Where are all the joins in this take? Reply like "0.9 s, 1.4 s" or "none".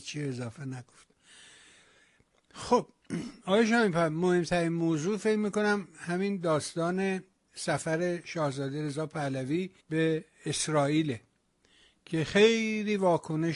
9.8 s

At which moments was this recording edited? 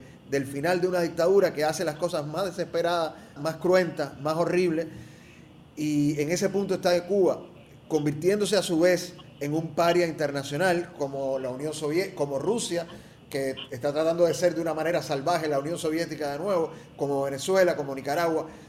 3.4 s

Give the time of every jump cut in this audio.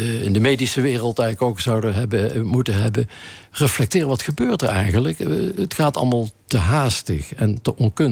none

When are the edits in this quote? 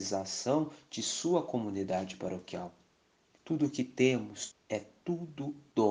3.4 s, 4.5 s

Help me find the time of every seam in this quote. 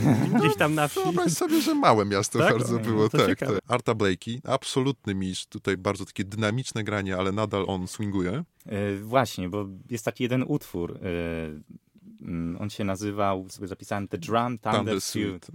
3.6 s

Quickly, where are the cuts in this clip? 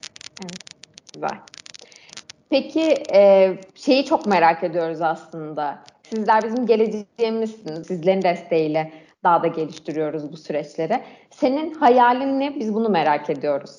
7.8 s

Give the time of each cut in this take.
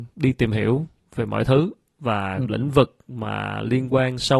2.4 s

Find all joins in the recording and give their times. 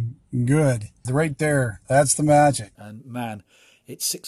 1.1 s, 2.8 s

